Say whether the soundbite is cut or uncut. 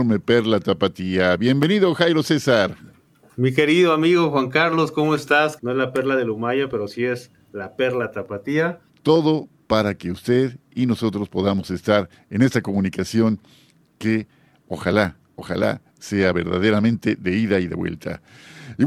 cut